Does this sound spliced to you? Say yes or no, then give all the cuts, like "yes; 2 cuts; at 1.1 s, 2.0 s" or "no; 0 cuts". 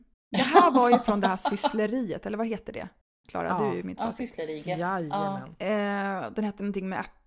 no; 0 cuts